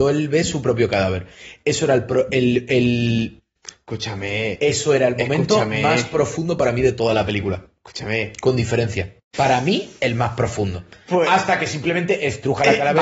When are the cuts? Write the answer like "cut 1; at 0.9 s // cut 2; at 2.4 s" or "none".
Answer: cut 1; at 9.2 s